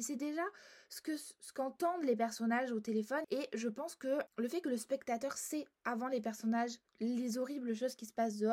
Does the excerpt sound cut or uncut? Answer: cut